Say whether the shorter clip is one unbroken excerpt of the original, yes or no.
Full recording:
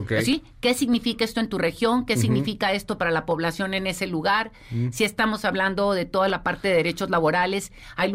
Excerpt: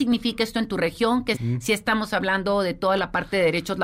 no